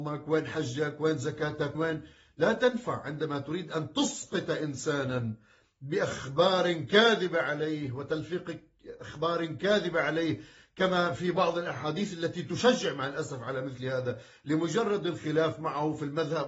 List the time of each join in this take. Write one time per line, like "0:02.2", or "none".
0:01.7